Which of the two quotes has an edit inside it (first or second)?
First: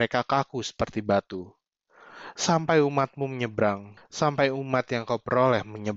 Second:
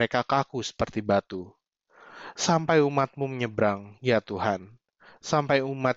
first